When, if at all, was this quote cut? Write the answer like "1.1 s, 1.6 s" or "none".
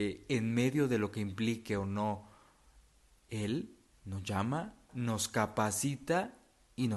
4.9 s